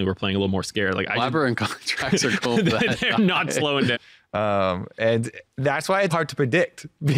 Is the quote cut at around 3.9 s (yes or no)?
yes